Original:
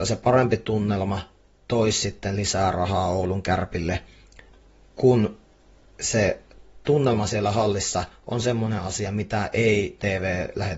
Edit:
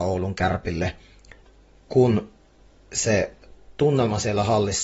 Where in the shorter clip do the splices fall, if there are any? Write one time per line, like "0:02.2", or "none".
none

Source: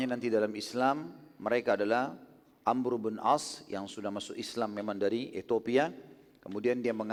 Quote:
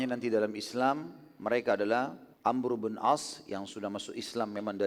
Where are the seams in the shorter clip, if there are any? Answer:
0:02.3

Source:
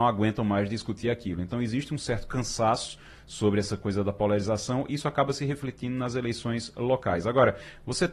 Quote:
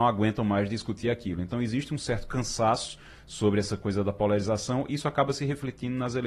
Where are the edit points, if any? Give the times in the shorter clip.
none

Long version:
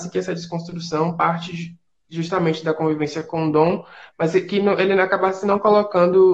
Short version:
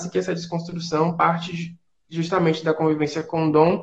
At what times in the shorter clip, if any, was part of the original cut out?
none

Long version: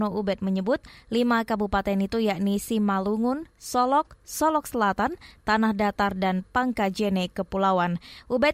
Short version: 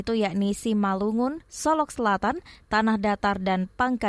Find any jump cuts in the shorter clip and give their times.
0:01.4

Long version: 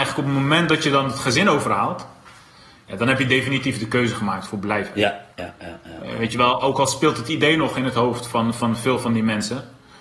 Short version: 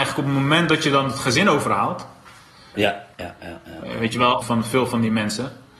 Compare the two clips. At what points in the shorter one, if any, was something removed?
0:02.7
0:04.4

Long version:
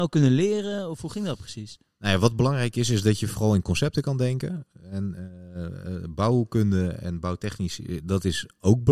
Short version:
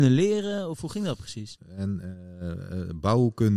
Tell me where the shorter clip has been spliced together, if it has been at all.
0:01.6

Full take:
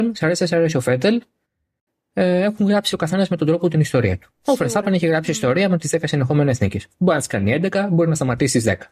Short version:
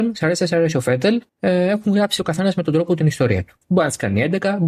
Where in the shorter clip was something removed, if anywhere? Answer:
0:01.3
0:03.6

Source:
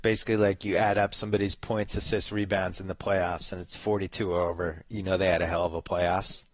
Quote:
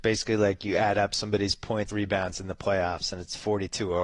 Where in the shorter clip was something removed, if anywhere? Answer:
0:01.9

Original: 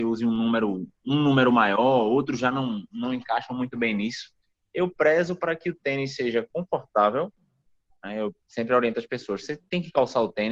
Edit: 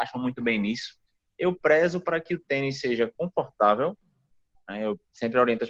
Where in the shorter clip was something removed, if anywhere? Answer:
none

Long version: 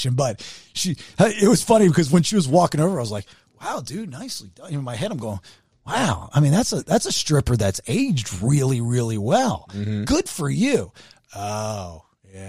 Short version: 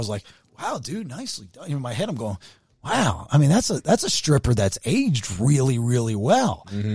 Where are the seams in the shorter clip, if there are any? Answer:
none

